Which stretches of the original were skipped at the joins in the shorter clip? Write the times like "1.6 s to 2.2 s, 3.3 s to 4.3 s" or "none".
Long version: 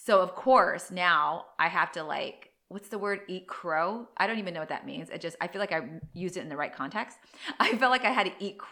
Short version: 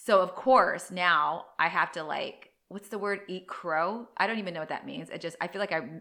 none